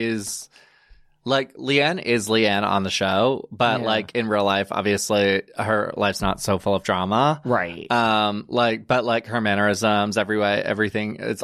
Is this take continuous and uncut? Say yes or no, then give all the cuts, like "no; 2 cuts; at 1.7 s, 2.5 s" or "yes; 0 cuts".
yes; 0 cuts